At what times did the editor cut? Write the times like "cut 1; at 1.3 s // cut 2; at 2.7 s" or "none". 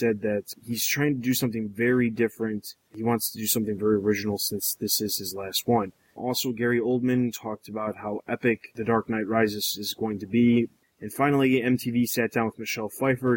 cut 1; at 10.8 s